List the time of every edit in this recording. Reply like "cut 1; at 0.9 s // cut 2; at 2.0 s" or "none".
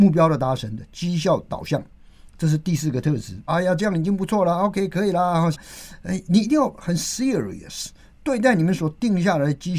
cut 1; at 3.5 s // cut 2; at 5.5 s